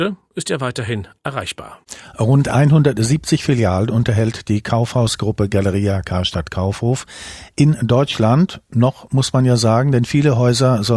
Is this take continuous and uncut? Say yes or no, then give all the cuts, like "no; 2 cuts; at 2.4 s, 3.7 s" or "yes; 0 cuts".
yes; 0 cuts